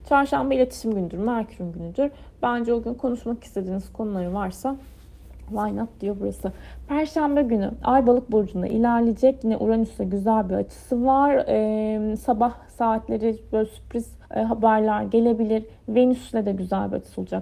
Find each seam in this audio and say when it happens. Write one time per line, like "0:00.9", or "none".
0:14.2